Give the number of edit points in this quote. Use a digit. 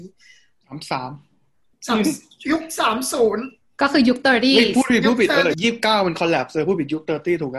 1